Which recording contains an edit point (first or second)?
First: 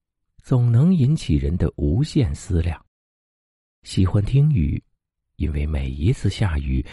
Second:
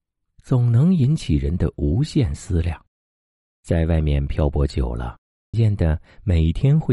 second